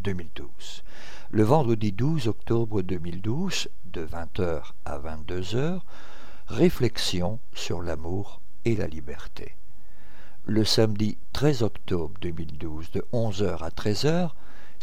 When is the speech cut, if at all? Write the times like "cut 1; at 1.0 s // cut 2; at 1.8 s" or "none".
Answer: none